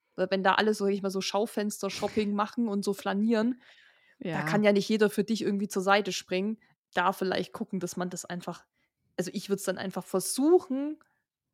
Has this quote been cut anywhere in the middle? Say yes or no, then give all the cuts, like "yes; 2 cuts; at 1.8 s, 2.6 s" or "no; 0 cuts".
no; 0 cuts